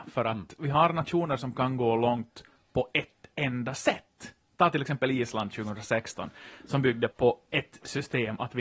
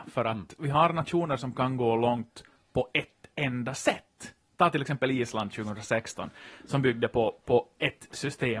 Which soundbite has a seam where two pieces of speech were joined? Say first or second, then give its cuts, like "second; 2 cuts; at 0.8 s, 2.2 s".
first; 1 cut; at 7.1 s